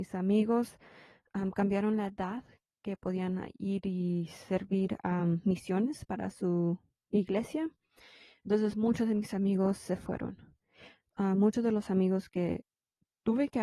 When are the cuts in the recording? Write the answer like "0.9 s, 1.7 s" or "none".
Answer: none